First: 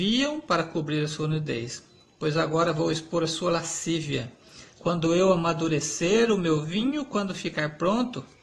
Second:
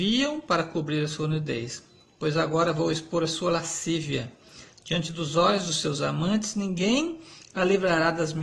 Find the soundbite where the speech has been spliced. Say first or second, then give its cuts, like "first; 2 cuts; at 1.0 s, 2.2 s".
first; 1 cut; at 4.8 s